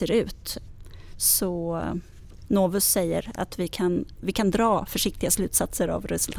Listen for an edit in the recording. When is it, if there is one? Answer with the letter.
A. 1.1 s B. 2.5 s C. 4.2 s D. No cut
C